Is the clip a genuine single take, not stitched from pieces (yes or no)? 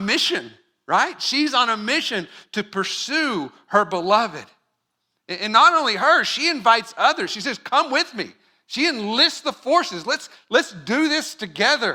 yes